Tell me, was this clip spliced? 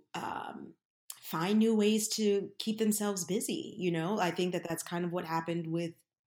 no; 0 cuts

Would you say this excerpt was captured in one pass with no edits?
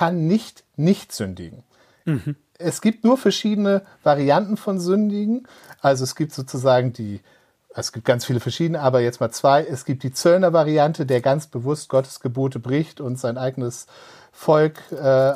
yes; 0 cuts

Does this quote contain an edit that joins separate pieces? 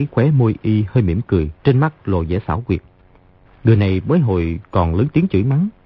yes; 1 cut; at 1.6 s

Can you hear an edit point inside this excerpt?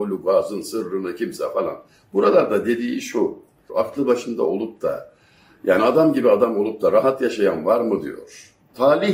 yes; 1 cut; at 3.7 s

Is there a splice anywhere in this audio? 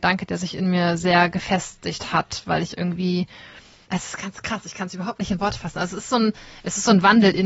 yes; 1 cut; at 3.8 s

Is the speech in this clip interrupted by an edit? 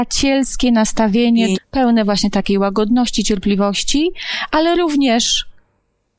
yes; 1 cut; at 1.5 s

